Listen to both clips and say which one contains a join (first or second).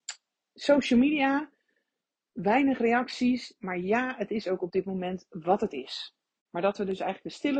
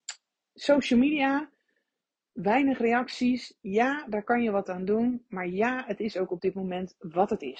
first